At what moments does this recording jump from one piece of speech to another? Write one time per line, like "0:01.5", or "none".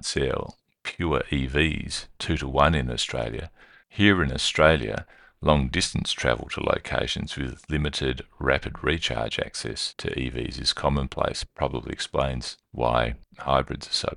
0:03.8